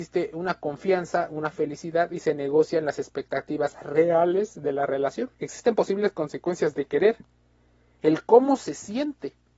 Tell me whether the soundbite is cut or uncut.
cut